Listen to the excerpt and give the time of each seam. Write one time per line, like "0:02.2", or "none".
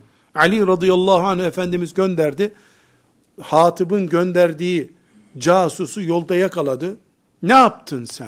0:07.3